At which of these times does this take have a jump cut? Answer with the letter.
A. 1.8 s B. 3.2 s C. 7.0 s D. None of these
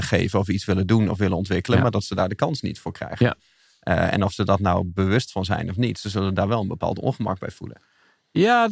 D